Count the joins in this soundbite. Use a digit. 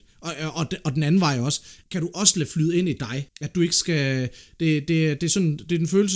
2